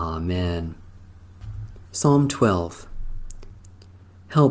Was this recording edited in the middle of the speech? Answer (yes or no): yes